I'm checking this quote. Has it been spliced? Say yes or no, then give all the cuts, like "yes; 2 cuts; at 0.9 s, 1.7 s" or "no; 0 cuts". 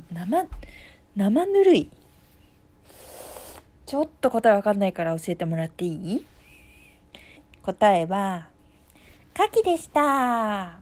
yes; 1 cut; at 7.4 s